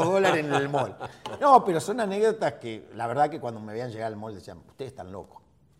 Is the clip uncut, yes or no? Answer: yes